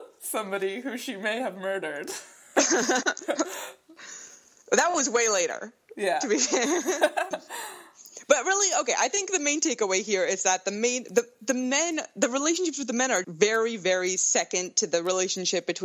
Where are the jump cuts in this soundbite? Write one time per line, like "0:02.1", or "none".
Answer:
0:07.3
0:13.2